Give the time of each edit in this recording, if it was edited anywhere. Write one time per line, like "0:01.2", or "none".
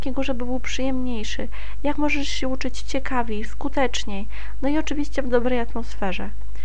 0:03.4